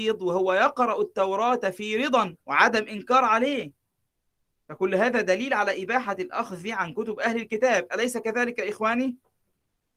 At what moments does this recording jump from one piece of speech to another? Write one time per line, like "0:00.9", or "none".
0:02.4